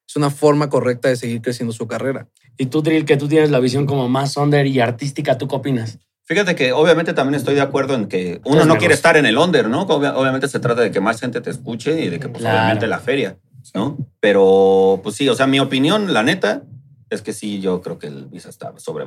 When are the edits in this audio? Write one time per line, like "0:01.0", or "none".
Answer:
0:08.4